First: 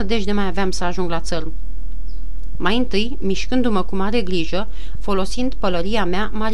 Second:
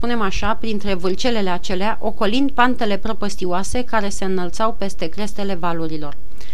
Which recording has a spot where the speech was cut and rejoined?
first; 2 cuts; at 2.5 s, 4.9 s

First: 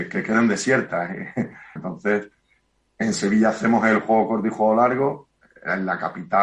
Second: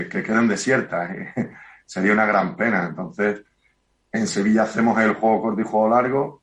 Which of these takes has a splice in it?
first; 1 cut; at 1.8 s

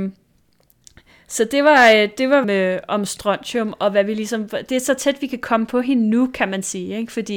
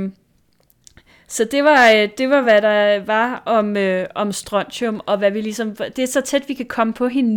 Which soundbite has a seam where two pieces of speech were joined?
first; 1 cut; at 2.4 s

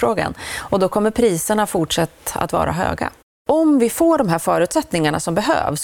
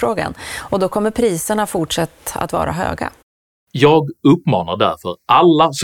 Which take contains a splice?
first; 1 cut; at 3.3 s

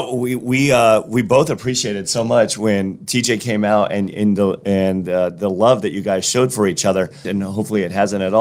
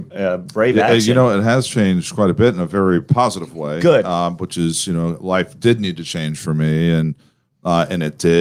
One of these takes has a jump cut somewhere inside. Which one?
first; 1 cut; at 7.2 s

